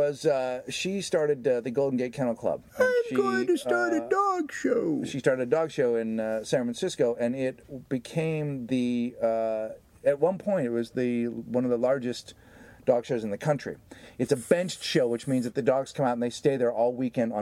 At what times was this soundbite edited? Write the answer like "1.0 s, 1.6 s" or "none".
none